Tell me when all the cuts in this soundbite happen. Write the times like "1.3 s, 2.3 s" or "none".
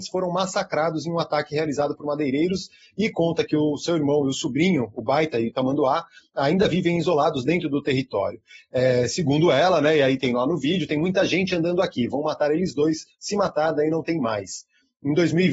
none